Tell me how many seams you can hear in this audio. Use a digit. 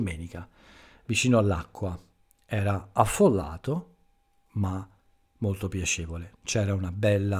0